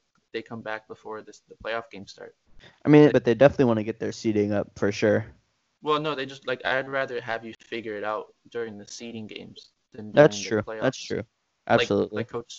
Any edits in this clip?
yes; 1 cut; at 3.1 s

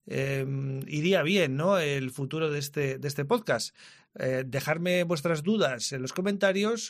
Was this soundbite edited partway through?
no; 0 cuts

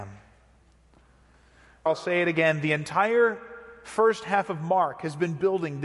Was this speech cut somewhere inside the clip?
yes; 1 cut; at 1.9 s

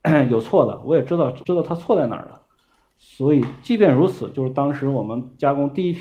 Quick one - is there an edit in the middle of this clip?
yes; 1 cut; at 1.4 s

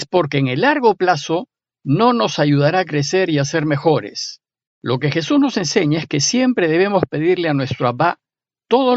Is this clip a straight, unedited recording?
no; 1 cut; at 4.7 s

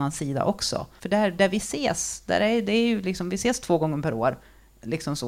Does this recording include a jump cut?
yes; 1 cut; at 1.0 s

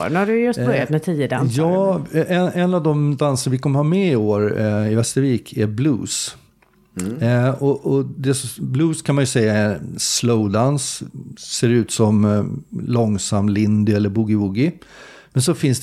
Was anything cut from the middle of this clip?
no; 0 cuts

